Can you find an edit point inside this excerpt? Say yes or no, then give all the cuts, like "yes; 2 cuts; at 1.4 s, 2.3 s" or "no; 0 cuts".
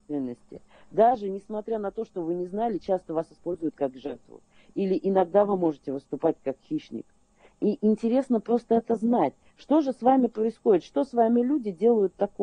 no; 0 cuts